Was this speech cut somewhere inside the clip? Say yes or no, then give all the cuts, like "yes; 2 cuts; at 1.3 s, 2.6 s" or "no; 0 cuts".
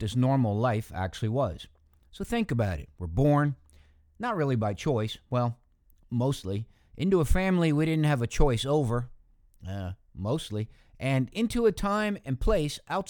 no; 0 cuts